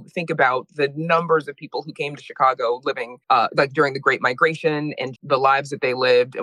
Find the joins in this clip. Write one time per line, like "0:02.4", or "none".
0:03.2
0:05.2